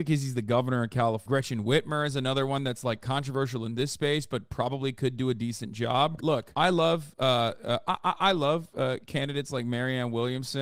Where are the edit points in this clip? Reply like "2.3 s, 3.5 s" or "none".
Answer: 1.2 s, 6.2 s

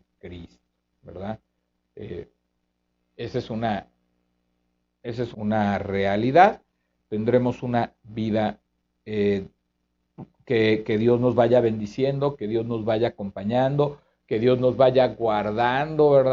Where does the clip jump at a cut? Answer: 5.3 s

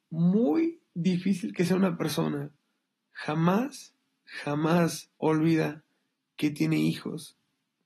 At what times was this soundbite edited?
3.0 s, 5.2 s

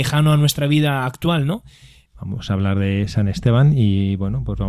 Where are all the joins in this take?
2.1 s

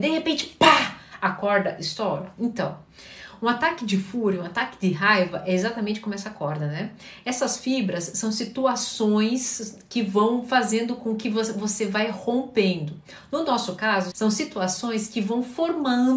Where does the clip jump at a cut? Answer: 14.1 s

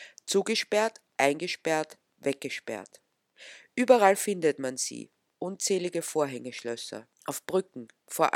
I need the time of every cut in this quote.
7.1 s

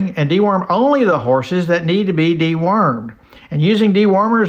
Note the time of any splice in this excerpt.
3.4 s

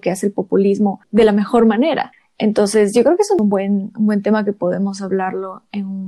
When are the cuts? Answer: none

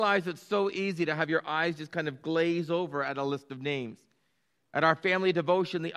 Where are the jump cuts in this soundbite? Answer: none

